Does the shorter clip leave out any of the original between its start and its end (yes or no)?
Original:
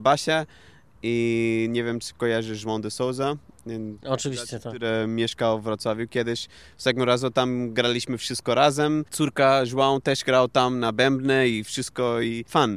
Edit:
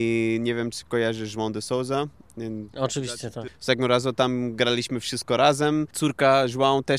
yes